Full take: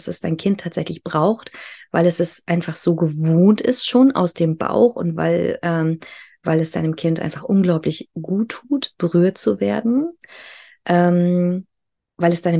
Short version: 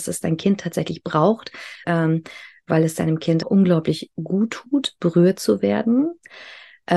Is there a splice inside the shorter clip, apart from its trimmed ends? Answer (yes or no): yes